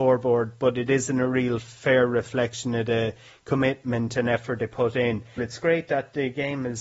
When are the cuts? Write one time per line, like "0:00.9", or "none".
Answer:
0:05.4